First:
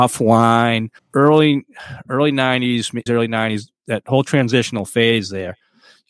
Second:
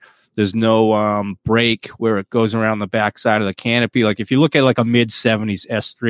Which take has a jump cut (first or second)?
first